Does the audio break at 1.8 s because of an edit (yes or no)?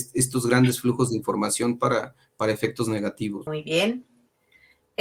no